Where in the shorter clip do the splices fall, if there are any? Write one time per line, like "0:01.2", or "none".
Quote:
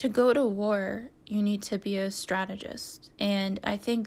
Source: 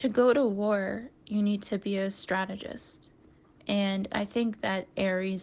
0:03.1